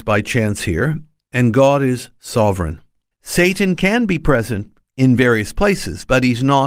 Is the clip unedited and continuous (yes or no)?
no